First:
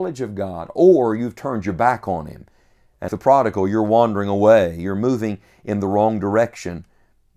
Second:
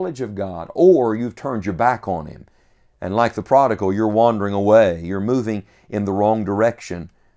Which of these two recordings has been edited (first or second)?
first